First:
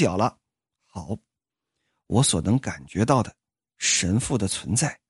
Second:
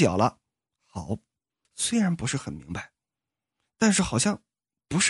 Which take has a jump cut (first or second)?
second